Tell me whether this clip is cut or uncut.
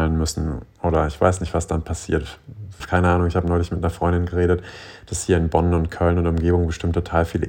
cut